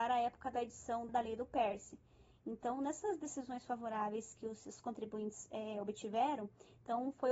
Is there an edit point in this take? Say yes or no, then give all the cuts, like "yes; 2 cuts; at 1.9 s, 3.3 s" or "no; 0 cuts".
yes; 2 cuts; at 1.1 s, 2.3 s